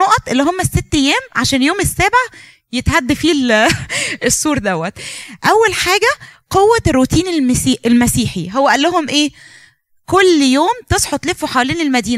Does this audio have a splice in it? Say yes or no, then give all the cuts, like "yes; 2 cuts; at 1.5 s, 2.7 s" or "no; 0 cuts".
no; 0 cuts